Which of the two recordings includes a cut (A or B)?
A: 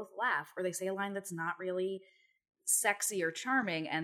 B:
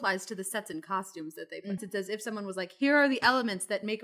B